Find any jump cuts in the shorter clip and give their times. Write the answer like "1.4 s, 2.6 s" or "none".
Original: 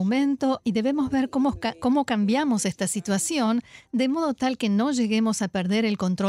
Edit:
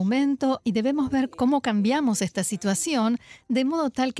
1.3 s